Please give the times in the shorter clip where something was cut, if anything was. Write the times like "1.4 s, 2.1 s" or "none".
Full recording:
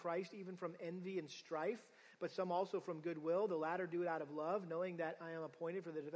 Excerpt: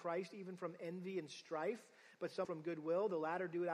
2.4 s